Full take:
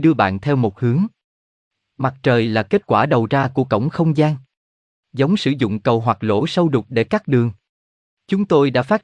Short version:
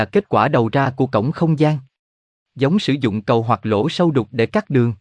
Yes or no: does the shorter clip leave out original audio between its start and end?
no